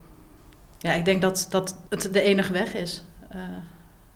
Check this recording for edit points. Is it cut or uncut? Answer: cut